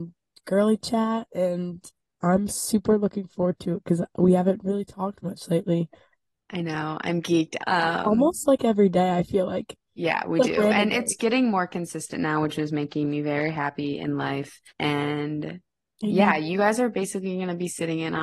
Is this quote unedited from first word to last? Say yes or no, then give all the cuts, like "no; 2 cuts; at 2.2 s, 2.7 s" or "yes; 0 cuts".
no; 2 cuts; at 7.6 s, 14.7 s